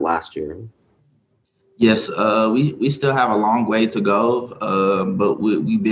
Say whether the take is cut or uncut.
uncut